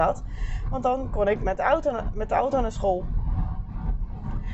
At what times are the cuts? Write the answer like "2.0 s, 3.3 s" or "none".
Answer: none